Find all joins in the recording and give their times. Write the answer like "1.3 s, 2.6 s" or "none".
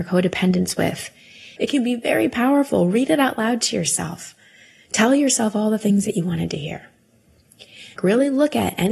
1.6 s, 8.0 s